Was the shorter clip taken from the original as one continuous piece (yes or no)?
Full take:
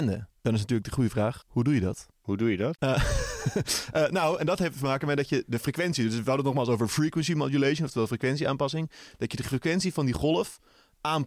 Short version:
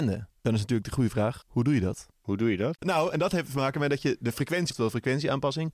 no